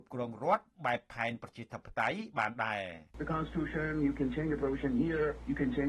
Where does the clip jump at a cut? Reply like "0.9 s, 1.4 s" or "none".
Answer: 3.1 s